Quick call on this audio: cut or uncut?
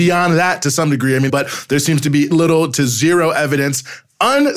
cut